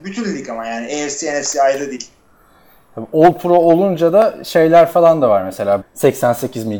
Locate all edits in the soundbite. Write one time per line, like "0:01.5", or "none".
0:05.8